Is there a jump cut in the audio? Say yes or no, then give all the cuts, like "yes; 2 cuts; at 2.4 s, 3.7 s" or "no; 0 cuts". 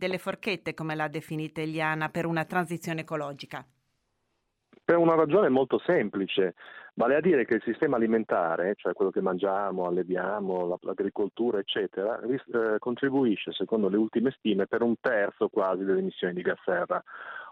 no; 0 cuts